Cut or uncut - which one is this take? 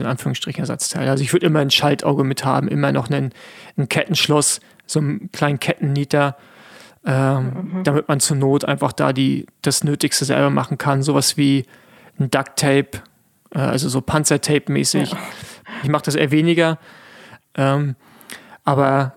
cut